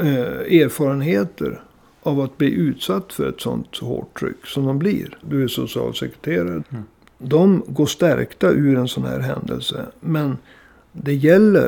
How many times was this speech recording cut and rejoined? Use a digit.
2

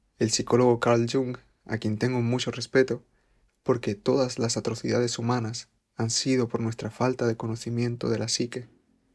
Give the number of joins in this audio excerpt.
1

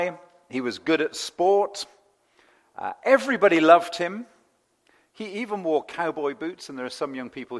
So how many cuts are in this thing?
0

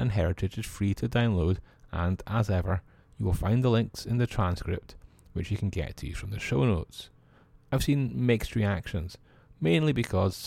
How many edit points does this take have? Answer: 0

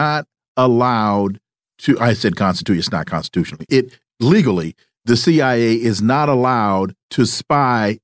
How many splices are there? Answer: 1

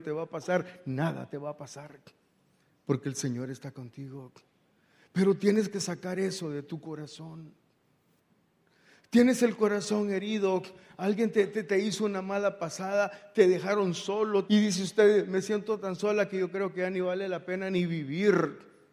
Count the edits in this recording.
1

